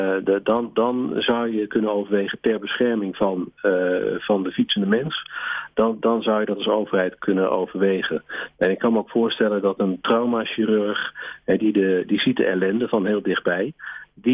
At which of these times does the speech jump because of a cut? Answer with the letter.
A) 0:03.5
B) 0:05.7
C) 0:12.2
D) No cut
D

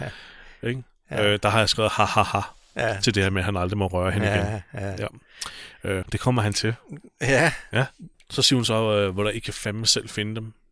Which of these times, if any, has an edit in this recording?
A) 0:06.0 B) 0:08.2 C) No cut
A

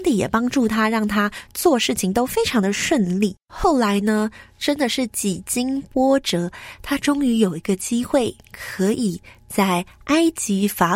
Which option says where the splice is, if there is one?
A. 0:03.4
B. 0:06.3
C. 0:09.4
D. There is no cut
A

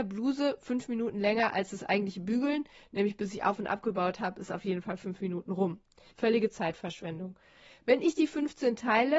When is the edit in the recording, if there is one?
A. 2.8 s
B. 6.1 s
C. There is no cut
B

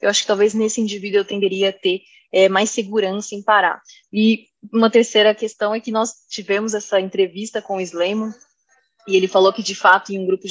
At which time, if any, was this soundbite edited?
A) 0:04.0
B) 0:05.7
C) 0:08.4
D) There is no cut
A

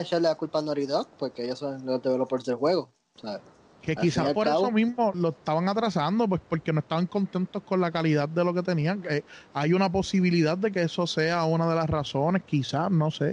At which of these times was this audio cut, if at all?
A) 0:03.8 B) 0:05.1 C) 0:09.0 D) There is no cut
B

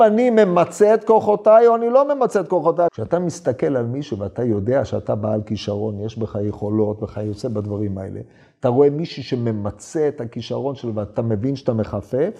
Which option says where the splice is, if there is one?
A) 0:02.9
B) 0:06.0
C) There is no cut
A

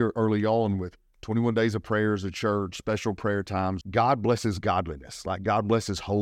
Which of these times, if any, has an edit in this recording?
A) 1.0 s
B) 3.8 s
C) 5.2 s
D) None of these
B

